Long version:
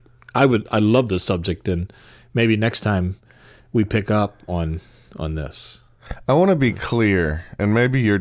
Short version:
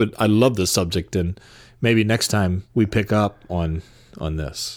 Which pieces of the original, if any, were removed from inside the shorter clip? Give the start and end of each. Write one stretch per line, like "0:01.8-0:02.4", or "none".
0:03.2-0:03.7